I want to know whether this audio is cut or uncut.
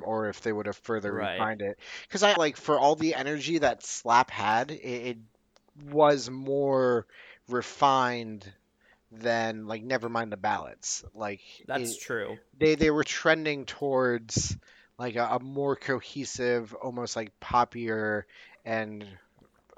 cut